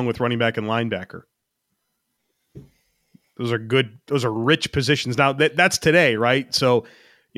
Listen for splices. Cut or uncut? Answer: uncut